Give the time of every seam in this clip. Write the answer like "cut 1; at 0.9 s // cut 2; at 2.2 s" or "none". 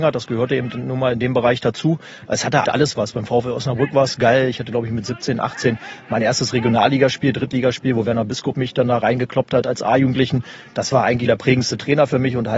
cut 1; at 2.7 s // cut 2; at 11.3 s